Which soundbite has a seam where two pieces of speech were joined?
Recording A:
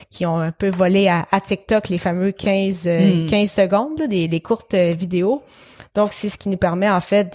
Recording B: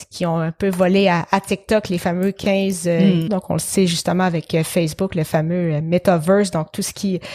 B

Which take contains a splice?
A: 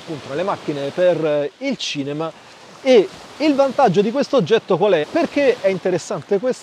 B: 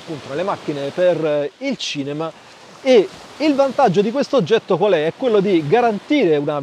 A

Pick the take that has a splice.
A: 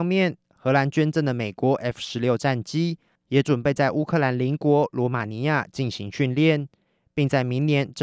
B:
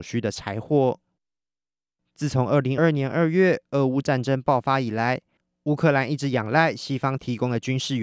B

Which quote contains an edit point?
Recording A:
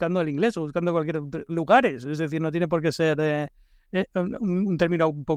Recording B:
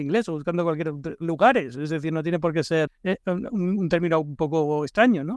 B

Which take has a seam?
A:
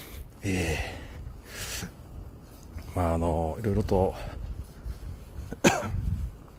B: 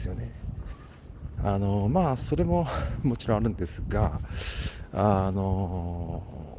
B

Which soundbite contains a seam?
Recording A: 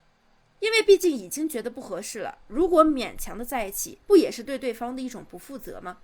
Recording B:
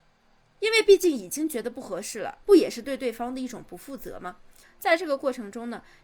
B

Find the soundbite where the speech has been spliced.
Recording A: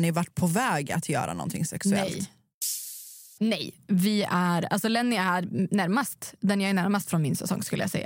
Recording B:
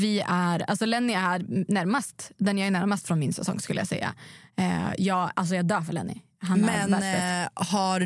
A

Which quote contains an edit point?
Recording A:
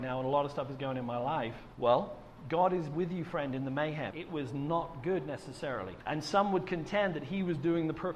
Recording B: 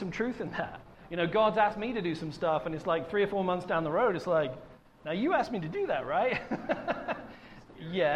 A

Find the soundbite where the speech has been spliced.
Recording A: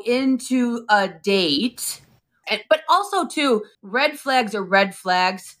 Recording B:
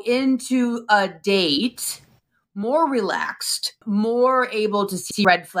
A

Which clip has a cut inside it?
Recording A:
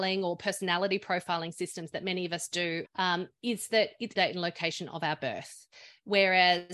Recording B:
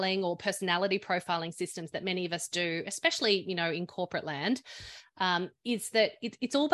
A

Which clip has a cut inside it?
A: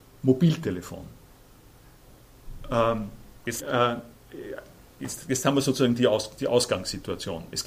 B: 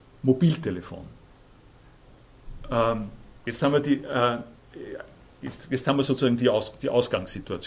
A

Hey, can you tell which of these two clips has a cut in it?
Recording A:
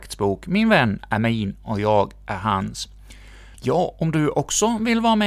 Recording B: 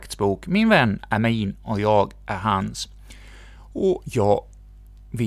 A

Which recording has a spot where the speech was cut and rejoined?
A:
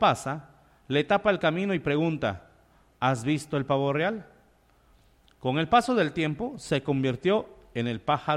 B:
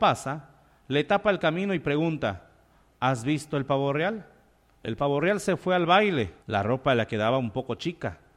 B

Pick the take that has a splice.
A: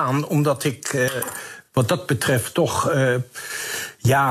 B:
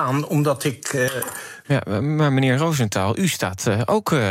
B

